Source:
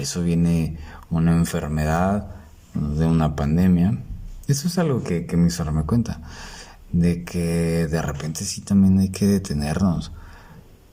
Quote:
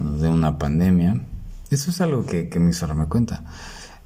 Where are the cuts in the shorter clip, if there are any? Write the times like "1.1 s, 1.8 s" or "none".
none